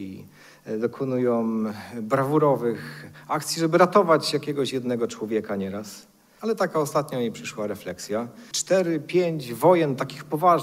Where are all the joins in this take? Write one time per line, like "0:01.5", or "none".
0:06.4
0:08.5